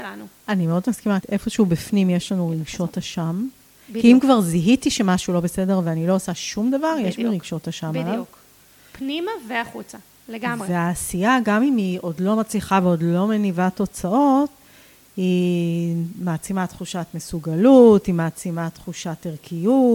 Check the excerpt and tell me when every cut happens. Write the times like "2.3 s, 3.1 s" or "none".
1.2 s